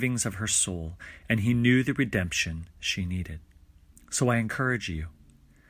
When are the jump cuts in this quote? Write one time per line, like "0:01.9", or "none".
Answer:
0:03.9